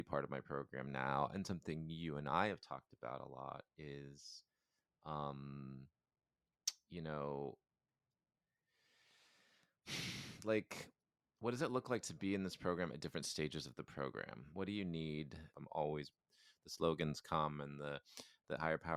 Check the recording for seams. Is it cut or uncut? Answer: cut